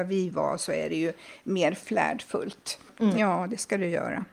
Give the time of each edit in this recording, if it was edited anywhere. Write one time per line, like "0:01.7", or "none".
0:03.2